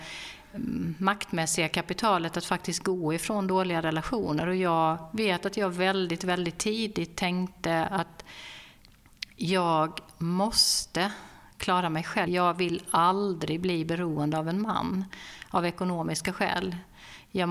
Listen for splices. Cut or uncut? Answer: cut